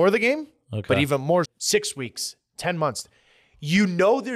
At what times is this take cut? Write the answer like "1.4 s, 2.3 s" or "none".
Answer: 1.4 s